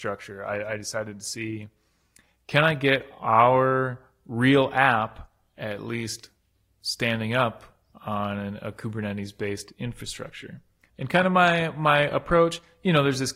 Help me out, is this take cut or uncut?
cut